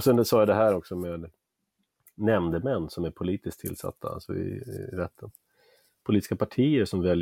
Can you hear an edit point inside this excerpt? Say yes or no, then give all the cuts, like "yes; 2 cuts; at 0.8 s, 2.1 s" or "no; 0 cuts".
no; 0 cuts